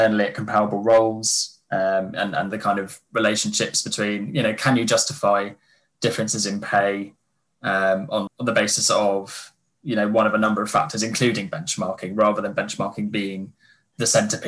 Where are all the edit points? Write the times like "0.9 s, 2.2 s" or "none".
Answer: 8.3 s